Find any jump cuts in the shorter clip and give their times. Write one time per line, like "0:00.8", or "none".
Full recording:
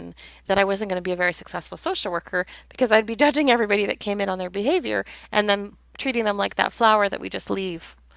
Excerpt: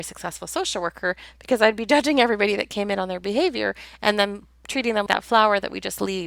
0:05.1